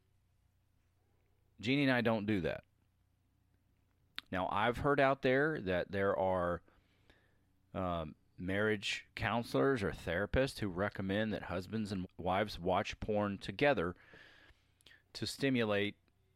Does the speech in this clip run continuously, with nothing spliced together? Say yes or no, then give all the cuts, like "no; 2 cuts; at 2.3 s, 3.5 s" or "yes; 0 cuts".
no; 2 cuts; at 4.2 s, 12.0 s